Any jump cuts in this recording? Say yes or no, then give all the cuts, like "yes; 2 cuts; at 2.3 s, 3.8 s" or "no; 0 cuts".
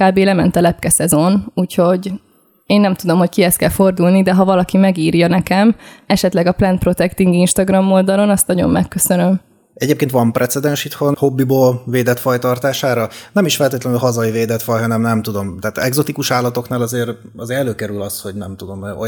no; 0 cuts